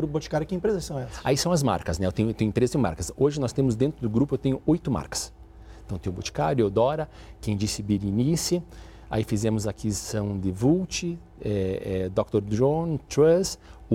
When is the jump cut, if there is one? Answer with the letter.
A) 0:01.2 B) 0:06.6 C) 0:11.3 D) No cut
D